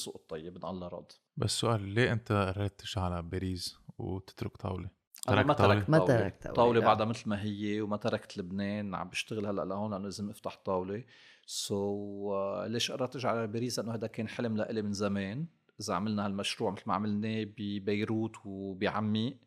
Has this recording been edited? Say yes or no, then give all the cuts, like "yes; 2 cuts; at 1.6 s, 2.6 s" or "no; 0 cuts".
no; 0 cuts